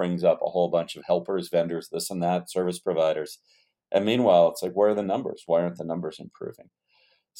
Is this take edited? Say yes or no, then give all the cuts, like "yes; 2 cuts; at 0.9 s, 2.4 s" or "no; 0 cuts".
no; 0 cuts